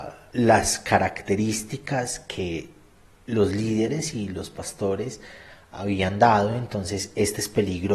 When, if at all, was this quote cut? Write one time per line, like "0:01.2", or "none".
none